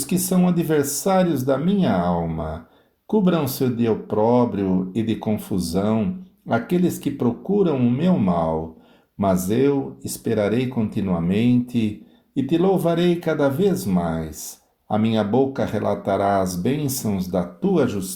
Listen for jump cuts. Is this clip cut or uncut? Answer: uncut